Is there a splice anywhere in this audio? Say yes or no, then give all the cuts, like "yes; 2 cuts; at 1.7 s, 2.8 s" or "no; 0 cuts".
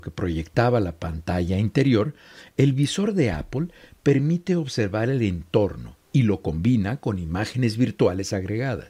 yes; 1 cut; at 6.0 s